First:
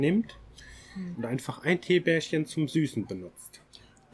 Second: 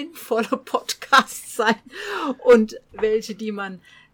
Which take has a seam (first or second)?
first